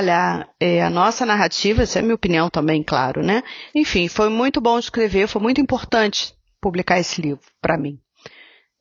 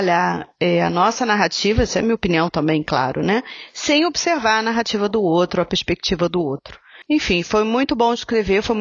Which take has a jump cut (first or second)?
first